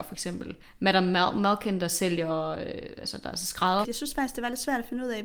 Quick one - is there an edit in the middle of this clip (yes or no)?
yes